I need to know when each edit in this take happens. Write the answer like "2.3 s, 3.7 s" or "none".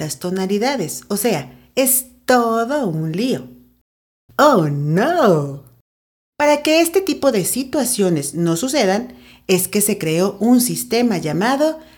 4.3 s